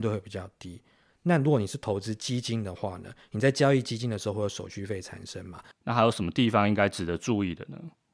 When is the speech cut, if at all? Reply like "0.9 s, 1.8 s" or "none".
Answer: 1.1 s, 5.7 s